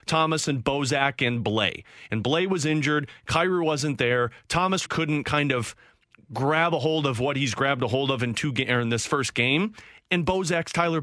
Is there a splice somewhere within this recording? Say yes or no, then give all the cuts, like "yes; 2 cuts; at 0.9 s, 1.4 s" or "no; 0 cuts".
yes; 1 cut; at 4.9 s